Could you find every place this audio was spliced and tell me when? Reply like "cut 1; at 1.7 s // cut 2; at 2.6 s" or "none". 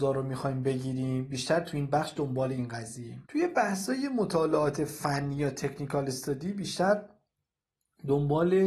cut 1; at 3.2 s

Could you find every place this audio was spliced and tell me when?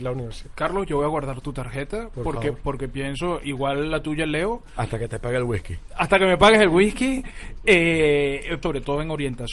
cut 1; at 8.6 s

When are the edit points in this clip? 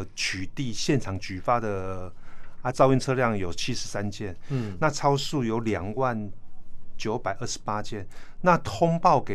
cut 1; at 2.7 s

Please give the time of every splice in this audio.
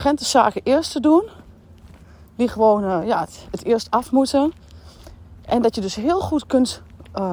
none

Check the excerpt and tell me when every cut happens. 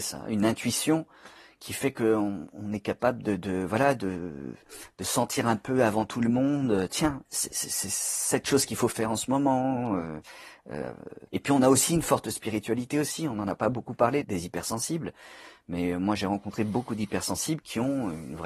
cut 1; at 7.3 s // cut 2; at 11.3 s // cut 3; at 14.2 s

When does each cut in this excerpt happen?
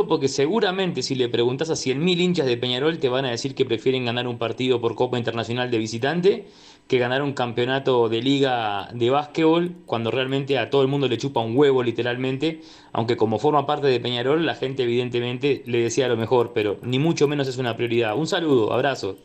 none

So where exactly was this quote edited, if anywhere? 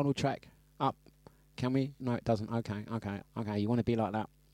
cut 1; at 2.0 s // cut 2; at 3.2 s

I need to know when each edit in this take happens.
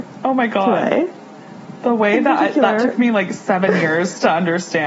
none

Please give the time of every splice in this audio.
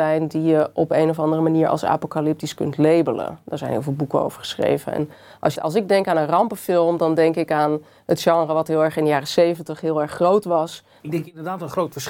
cut 1; at 5.6 s // cut 2; at 11.0 s

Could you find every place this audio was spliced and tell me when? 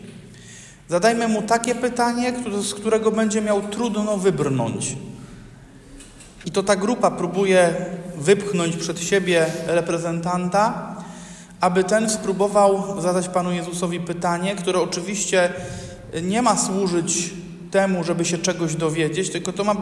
cut 1; at 6.4 s

